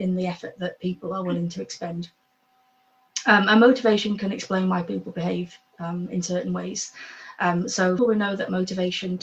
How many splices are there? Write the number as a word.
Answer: one